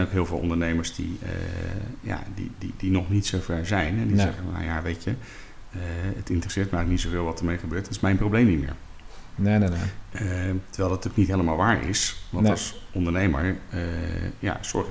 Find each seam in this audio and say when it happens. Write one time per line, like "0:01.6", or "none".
none